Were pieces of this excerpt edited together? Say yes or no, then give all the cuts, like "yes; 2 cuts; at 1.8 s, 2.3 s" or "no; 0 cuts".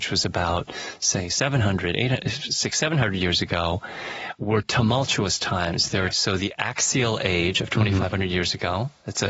yes; 1 cut; at 6.1 s